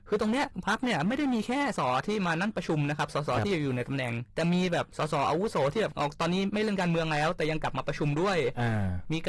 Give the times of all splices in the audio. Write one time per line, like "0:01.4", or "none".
0:01.8